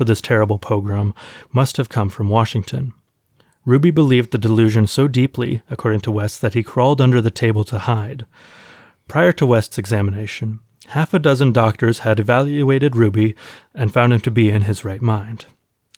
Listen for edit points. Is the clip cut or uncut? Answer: uncut